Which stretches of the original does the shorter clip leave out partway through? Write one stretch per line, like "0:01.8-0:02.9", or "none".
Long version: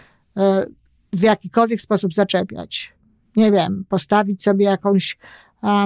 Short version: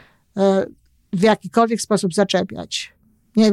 none